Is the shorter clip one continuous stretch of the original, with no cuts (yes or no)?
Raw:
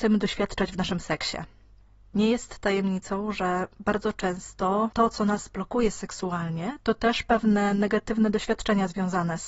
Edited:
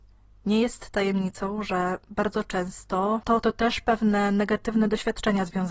no